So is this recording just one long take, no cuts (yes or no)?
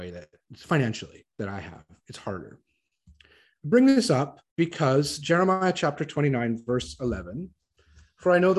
no